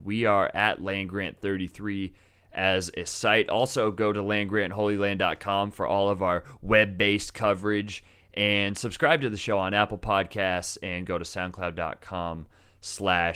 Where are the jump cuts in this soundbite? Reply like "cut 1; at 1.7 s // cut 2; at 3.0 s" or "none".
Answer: none